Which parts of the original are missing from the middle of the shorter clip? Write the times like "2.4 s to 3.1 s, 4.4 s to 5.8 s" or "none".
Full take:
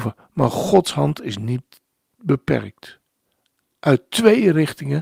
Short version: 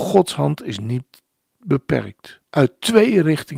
3.1 s to 3.8 s

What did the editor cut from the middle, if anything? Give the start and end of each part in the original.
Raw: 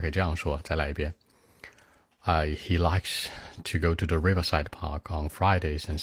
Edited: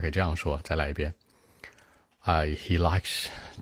none

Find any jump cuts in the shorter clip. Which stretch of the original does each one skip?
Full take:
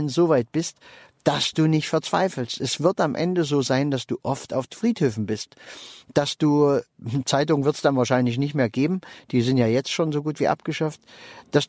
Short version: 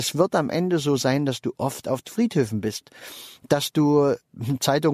none

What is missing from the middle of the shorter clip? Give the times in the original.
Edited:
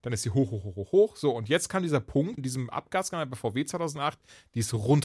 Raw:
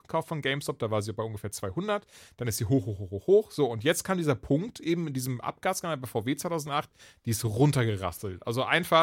4.7 s to 5.1 s

